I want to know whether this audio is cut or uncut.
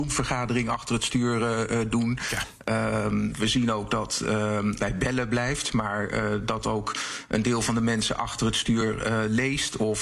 cut